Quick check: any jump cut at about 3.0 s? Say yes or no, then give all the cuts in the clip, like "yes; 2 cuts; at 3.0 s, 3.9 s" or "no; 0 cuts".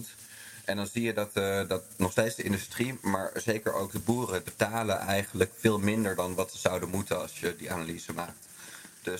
no; 1 cut; at 4.4 s